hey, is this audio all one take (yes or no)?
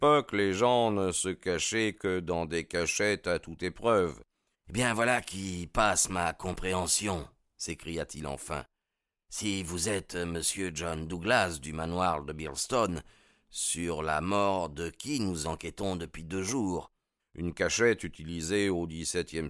no